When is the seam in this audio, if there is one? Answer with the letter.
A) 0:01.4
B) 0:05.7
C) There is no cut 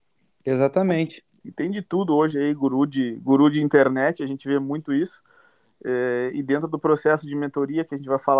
A